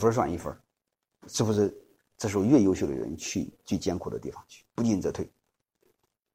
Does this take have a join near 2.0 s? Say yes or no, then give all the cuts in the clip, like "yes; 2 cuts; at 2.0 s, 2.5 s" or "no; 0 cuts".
yes; 2 cuts; at 2.0 s, 4.8 s